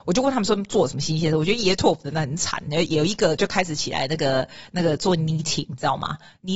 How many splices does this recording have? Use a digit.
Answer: 0